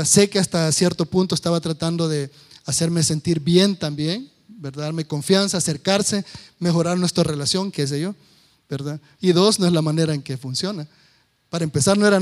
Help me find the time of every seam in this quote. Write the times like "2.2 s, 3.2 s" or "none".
9.2 s